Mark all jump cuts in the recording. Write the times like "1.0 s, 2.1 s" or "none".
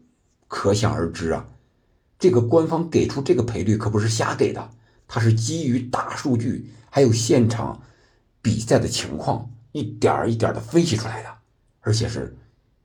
none